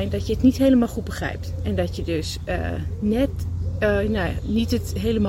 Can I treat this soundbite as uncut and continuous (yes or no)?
yes